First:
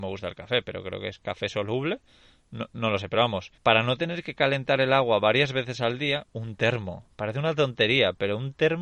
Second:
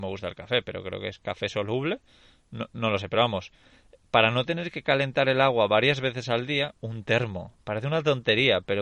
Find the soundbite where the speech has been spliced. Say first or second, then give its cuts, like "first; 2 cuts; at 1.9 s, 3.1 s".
first; 1 cut; at 3.6 s